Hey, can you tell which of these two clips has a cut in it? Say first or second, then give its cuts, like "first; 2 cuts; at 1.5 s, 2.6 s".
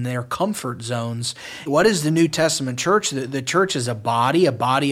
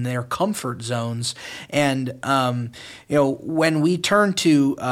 first; 1 cut; at 1.7 s